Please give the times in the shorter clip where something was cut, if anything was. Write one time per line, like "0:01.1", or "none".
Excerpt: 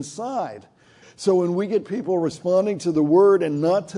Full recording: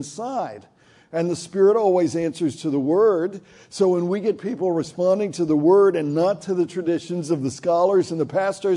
0:01.0